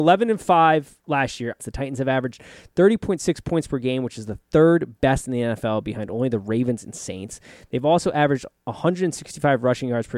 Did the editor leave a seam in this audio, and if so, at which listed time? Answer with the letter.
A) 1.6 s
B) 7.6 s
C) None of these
A